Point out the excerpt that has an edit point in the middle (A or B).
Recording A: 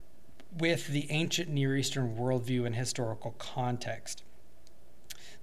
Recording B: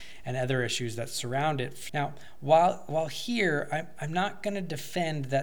B